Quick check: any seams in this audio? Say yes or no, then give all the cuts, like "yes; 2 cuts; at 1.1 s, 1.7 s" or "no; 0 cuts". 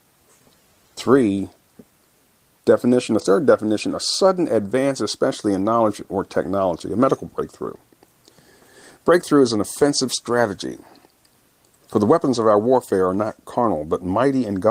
no; 0 cuts